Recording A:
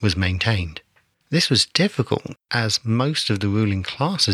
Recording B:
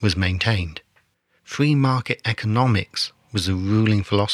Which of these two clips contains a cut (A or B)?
A